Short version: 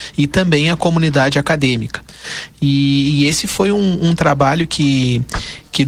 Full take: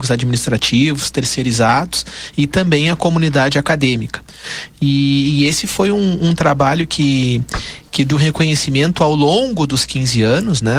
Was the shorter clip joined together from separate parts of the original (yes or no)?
no